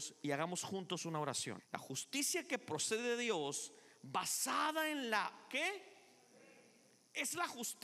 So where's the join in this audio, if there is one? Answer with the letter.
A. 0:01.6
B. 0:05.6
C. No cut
A